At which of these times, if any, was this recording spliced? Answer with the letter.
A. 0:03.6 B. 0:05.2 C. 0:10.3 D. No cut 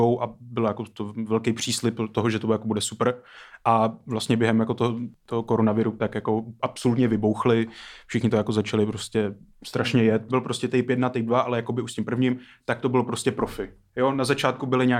C